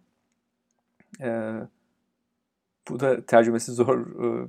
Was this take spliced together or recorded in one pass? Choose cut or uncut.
uncut